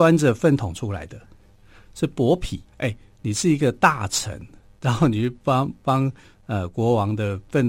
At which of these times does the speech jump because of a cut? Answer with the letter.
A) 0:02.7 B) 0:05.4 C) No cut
A